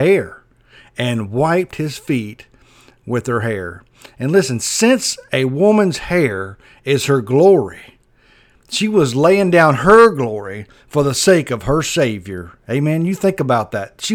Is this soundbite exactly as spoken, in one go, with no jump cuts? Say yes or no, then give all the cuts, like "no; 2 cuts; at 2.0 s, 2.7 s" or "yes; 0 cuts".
yes; 0 cuts